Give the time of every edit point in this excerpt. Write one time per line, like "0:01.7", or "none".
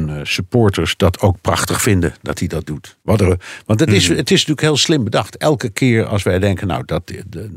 0:03.0